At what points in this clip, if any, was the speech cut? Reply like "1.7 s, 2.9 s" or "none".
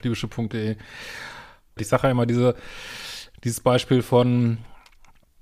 1.8 s

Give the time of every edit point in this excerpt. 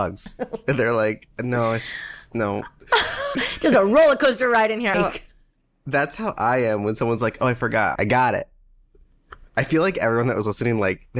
3.4 s, 4.9 s, 8.0 s

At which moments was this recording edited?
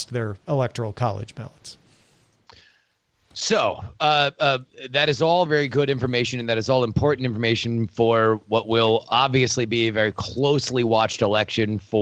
5.5 s

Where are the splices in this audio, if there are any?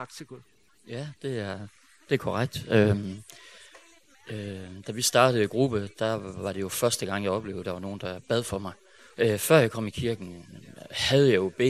9.1 s

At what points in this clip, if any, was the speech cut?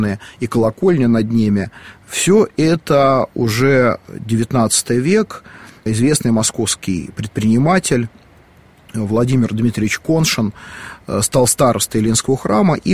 5.9 s

